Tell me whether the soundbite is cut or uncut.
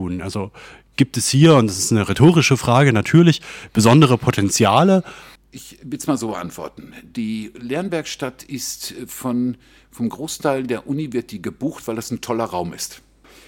cut